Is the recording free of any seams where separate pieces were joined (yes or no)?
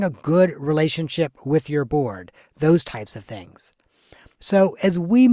no